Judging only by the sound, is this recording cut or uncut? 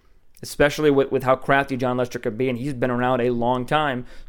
uncut